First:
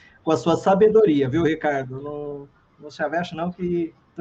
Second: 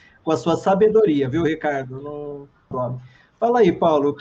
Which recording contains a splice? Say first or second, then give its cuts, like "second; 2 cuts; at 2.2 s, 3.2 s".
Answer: second; 1 cut; at 2.7 s